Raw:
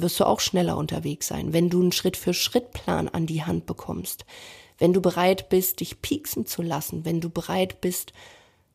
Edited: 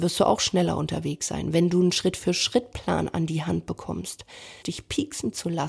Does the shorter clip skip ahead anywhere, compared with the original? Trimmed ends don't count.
yes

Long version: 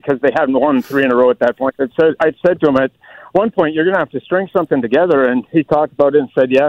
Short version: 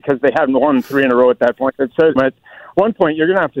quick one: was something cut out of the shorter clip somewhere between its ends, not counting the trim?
yes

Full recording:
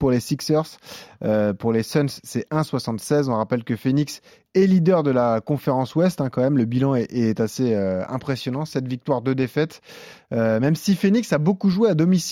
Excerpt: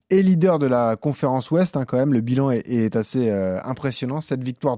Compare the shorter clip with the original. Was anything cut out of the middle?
no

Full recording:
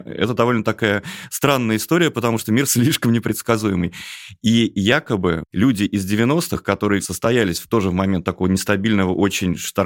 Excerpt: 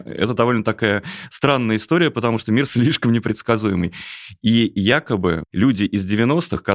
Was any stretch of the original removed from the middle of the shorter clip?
no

